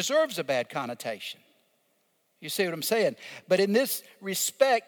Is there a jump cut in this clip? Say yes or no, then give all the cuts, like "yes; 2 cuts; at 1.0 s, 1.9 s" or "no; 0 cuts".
no; 0 cuts